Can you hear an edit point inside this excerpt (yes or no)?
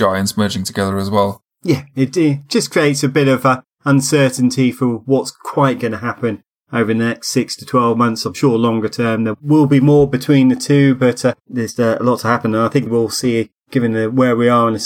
yes